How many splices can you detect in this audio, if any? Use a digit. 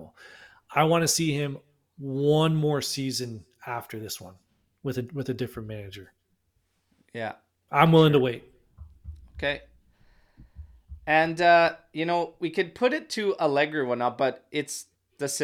0